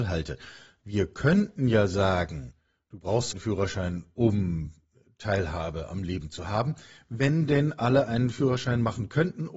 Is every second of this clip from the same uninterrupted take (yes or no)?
no